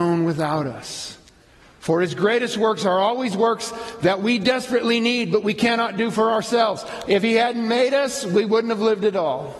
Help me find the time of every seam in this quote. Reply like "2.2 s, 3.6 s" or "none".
7.0 s

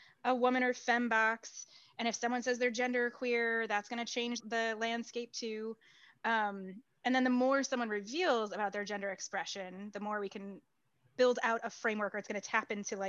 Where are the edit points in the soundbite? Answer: 4.4 s

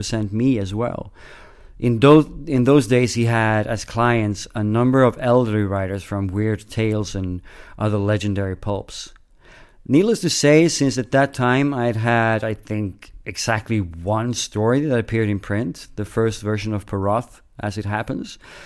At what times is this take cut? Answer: none

